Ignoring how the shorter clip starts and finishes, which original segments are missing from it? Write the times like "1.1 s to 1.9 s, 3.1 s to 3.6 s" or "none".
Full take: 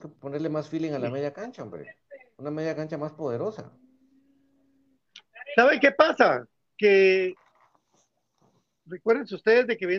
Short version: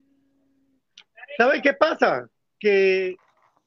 none